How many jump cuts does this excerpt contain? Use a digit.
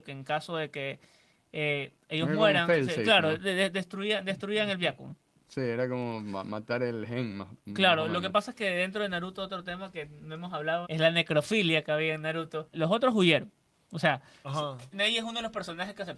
3